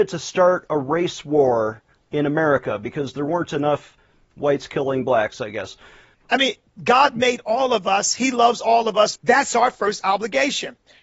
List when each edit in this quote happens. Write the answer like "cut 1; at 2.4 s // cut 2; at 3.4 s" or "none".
cut 1; at 6.1 s // cut 2; at 9.2 s